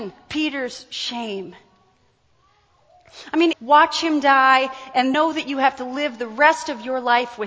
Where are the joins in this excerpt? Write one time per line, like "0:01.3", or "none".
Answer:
0:03.5
0:05.1